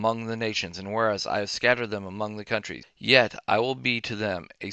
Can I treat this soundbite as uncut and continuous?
yes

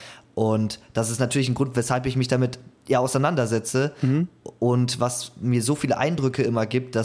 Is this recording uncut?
no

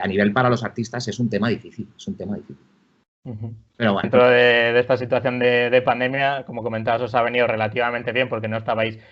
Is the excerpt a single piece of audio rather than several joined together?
no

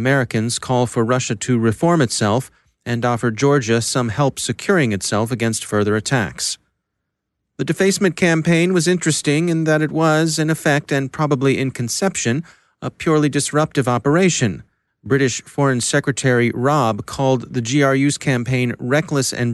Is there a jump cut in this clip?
yes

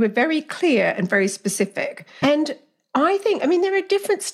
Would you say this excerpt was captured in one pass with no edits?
no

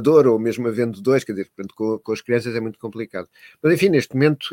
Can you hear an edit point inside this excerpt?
no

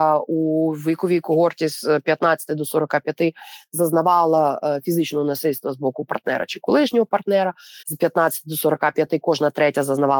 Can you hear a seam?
yes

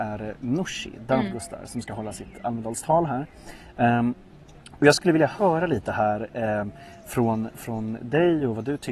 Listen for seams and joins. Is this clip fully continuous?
yes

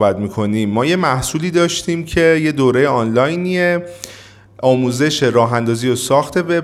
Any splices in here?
no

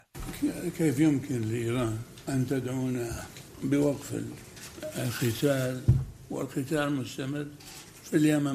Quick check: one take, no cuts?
yes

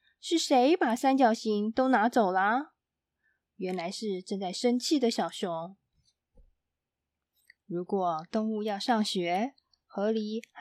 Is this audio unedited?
no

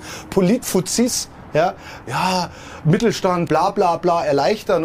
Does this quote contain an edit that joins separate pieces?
yes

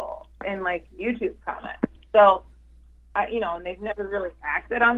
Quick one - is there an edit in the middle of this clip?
no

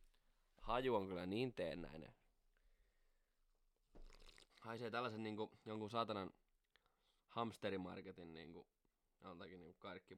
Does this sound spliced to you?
yes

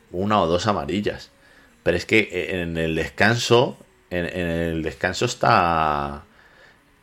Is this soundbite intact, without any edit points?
yes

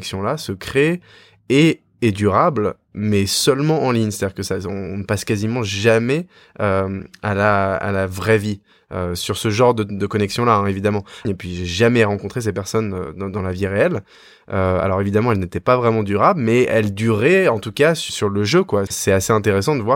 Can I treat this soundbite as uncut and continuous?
no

